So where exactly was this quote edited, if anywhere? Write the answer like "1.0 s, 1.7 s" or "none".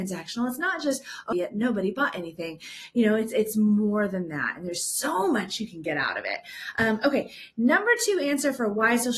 1.3 s